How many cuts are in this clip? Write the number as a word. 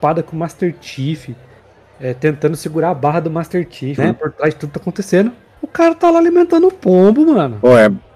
one